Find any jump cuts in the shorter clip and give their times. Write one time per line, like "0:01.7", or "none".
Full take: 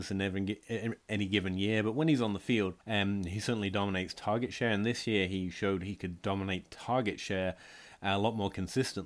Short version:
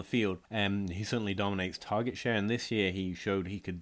none

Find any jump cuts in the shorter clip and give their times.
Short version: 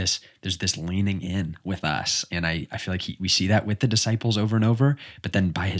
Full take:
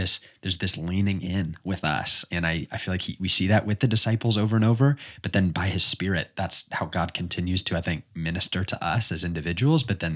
none

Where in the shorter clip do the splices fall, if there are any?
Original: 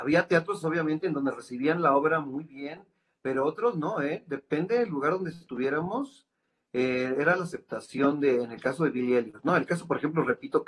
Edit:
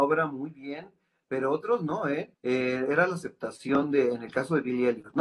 0:02.3

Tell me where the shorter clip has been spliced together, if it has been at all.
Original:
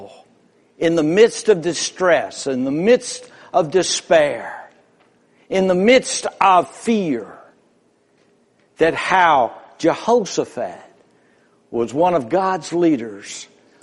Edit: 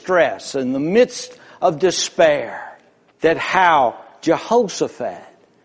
0:03.1

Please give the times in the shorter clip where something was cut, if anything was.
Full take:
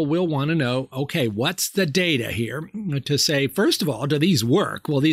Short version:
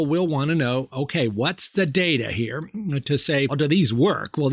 0:03.5

